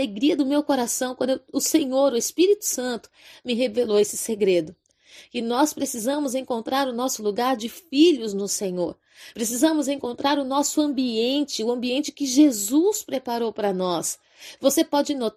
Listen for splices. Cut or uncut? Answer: uncut